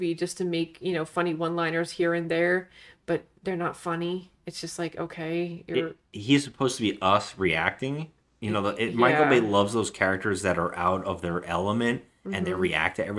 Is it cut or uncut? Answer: uncut